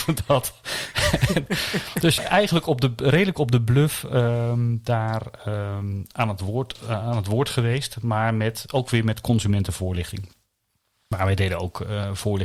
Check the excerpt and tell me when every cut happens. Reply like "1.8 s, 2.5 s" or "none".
2.2 s